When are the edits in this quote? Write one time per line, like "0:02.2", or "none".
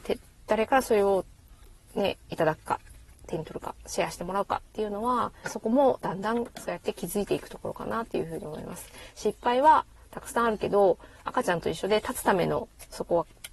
0:02.2
0:05.4